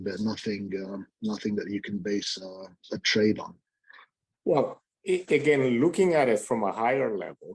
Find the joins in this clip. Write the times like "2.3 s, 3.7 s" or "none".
4.3 s